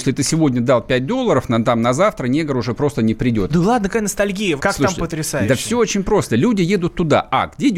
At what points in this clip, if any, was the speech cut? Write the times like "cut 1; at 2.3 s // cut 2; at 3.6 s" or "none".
cut 1; at 3.5 s // cut 2; at 4.6 s